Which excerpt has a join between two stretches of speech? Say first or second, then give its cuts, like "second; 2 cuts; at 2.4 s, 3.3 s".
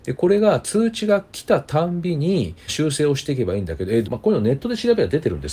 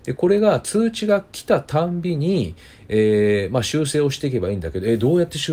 first; 2 cuts; at 2.7 s, 4.0 s